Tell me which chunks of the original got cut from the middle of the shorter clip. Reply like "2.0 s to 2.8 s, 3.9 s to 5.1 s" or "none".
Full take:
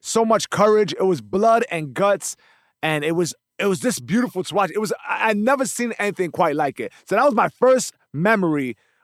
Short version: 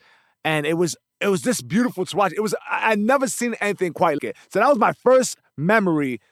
6.6 s to 6.7 s